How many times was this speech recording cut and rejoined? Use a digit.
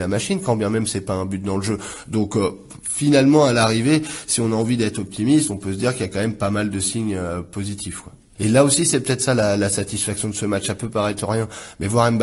1